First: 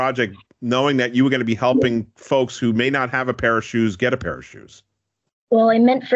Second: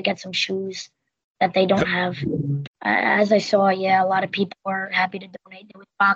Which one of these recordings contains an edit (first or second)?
second